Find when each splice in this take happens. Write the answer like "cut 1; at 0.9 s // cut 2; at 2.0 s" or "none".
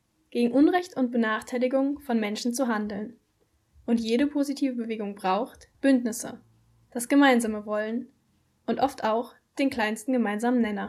cut 1; at 5.7 s